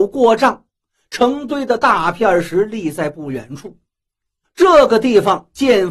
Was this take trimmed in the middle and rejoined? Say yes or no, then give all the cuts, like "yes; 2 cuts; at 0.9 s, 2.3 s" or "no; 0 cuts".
yes; 1 cut; at 4.4 s